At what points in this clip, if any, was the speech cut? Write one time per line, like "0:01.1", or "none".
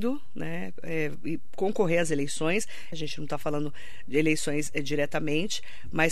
0:02.9